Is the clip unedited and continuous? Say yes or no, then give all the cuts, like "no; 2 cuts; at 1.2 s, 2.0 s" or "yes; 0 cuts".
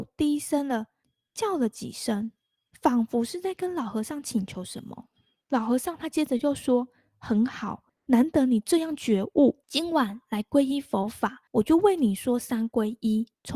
no; 1 cut; at 5.4 s